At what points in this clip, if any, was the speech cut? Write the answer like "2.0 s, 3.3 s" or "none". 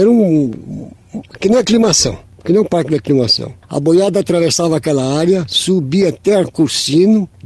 none